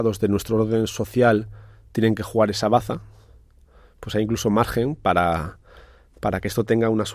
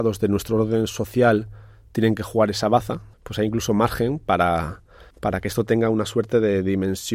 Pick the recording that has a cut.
second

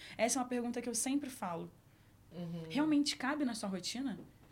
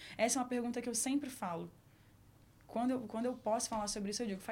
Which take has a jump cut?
first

